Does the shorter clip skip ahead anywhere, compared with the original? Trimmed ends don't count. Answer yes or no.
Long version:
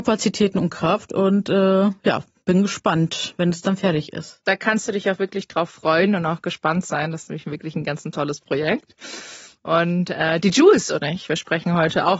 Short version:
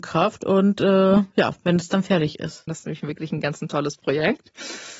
yes